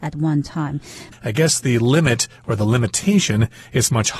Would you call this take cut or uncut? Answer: cut